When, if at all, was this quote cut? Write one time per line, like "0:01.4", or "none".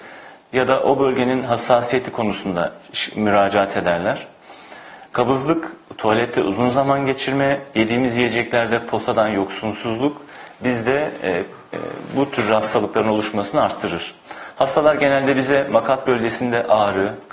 0:05.1